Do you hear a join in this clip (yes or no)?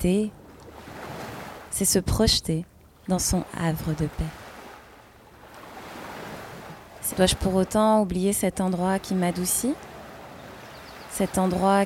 yes